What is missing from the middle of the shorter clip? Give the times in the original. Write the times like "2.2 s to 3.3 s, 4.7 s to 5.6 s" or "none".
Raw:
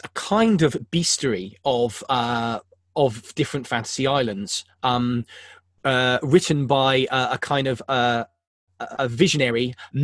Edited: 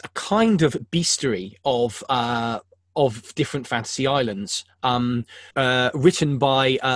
5.5 s to 5.8 s